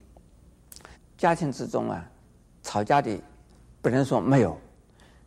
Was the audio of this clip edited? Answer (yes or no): yes